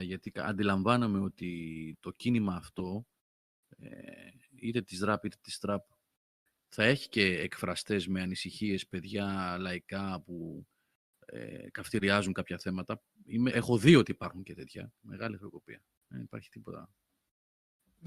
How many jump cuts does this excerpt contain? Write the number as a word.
two